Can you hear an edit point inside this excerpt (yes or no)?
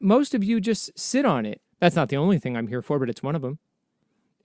yes